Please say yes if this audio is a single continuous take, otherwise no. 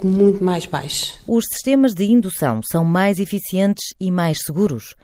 yes